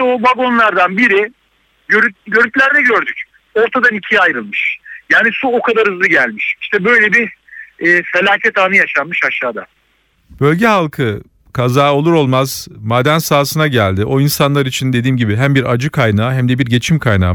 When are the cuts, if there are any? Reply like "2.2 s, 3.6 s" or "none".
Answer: 6.6 s

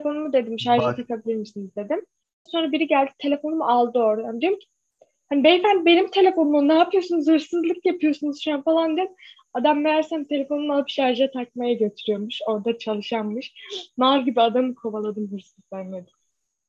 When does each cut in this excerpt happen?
2.5 s

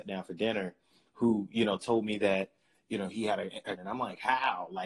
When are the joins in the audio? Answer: 3.8 s

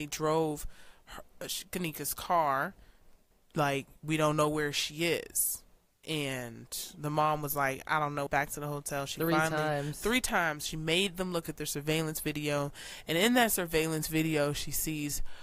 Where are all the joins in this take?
8.3 s

